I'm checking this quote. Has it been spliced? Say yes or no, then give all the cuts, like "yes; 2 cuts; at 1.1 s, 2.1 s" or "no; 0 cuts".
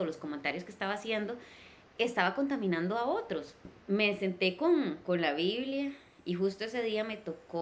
yes; 1 cut; at 3.8 s